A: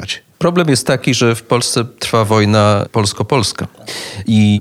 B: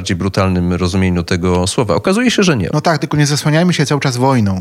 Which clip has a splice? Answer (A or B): B